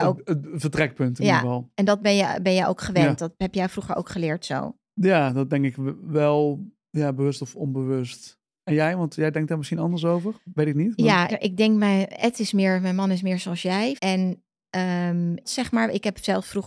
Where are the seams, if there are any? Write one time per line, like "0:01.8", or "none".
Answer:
0:11.3
0:14.0
0:15.4